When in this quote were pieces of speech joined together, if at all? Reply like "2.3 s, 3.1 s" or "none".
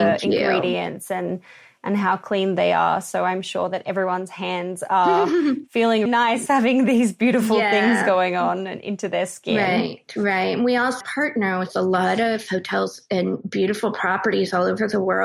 6.1 s, 11.0 s